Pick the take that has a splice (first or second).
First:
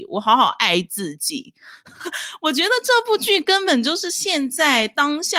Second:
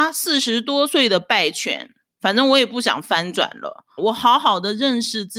second